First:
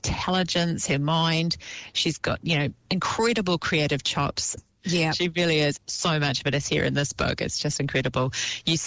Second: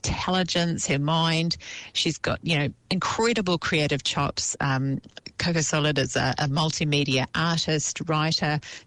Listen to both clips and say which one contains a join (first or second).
first